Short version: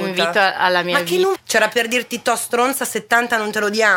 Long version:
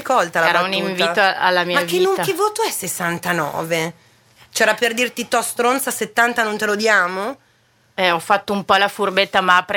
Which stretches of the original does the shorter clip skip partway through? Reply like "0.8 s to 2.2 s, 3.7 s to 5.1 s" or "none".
2.2 s to 4.4 s